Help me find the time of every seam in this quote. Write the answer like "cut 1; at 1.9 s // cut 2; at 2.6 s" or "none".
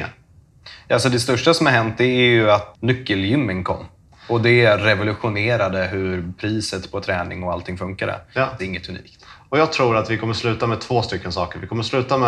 cut 1; at 2.7 s // cut 2; at 8.6 s